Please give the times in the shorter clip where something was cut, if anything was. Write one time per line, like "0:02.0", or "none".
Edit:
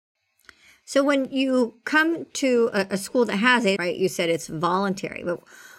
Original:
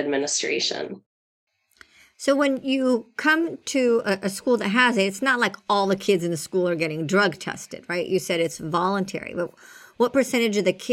0:03.8